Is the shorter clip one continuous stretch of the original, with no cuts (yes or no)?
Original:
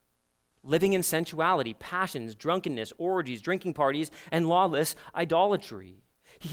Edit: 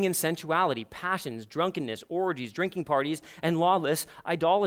yes